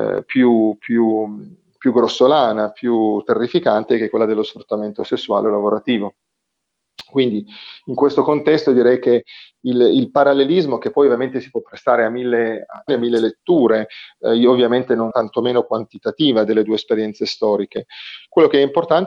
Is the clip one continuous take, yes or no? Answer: no